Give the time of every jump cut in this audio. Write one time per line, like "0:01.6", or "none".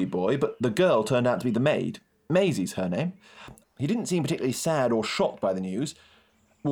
0:03.6